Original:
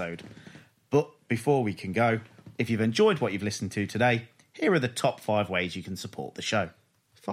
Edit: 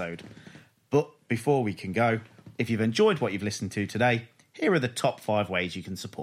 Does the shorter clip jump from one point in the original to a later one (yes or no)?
no